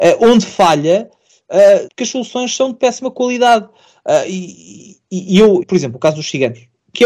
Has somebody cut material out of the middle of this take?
yes; 2 cuts; at 1.9 s, 5.6 s

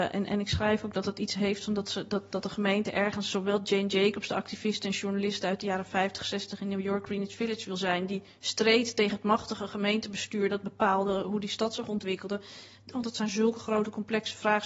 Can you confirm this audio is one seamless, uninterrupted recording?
no; 1 cut; at 12.9 s

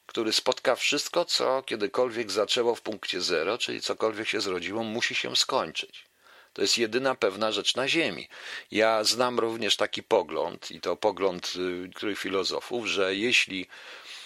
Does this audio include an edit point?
no; 0 cuts

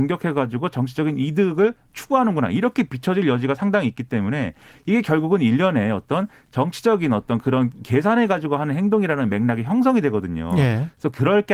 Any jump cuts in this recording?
no; 0 cuts

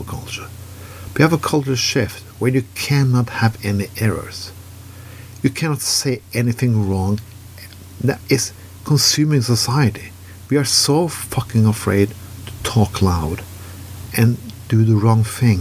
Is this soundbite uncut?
no; 1 cut; at 8.2 s

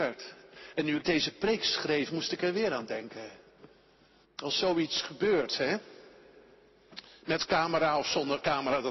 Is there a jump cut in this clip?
yes; 1 cut; at 4.2 s

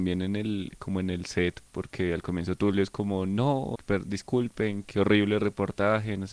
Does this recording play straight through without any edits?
no; 2 cuts; at 3.7 s, 4.8 s

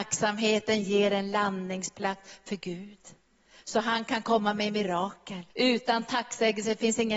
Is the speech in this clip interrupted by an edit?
yes; 1 cut; at 5.5 s

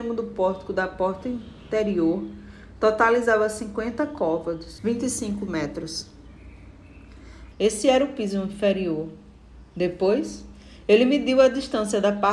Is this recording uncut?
no; 2 cuts; at 4.8 s, 7.5 s

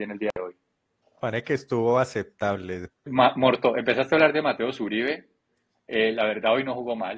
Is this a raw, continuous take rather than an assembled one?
no; 1 cut; at 3.1 s

